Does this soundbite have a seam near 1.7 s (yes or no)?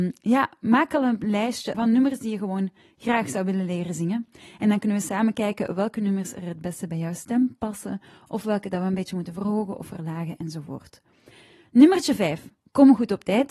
yes